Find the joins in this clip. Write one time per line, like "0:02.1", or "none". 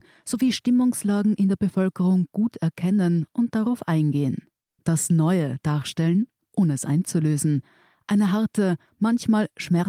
0:04.8